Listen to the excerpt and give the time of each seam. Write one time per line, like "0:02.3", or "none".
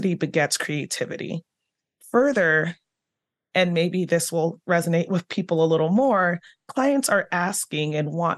none